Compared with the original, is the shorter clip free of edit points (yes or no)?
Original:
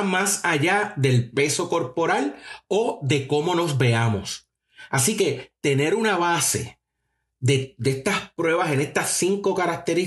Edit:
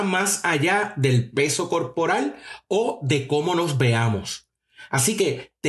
yes